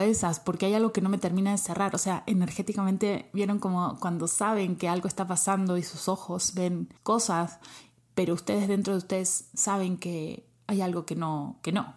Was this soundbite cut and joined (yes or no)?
yes